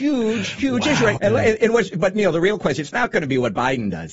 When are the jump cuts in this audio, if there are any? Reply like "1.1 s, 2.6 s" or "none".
1.2 s